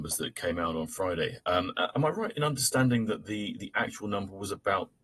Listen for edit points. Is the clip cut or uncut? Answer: uncut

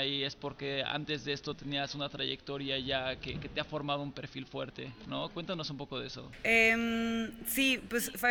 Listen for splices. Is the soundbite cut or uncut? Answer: uncut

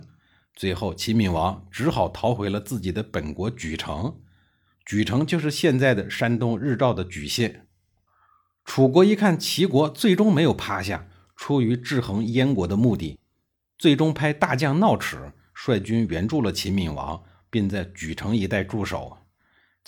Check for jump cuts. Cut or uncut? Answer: uncut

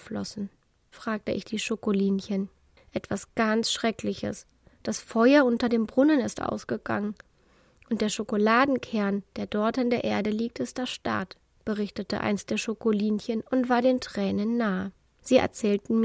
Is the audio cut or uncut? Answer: cut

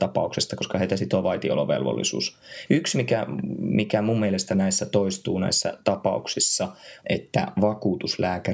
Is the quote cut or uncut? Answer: cut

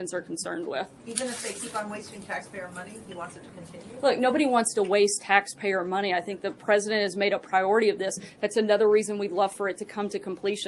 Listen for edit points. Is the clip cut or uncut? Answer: uncut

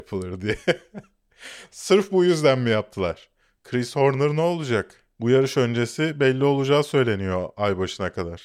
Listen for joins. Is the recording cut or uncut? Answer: uncut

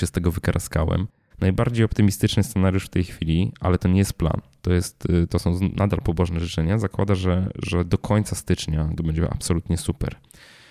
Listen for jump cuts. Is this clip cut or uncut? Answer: cut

